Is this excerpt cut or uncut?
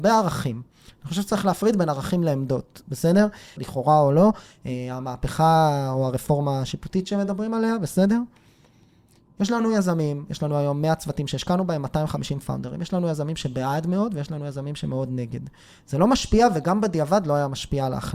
cut